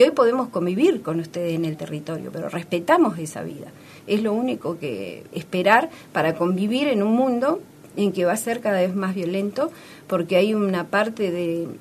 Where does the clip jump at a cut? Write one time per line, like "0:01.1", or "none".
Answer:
0:04.0
0:05.3